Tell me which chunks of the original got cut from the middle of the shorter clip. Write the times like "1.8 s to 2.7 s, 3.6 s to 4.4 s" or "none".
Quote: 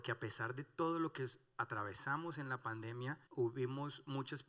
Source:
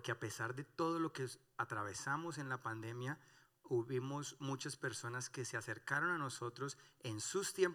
3.3 s to 3.6 s